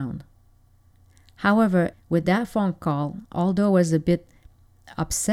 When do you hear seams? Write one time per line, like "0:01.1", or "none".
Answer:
0:01.9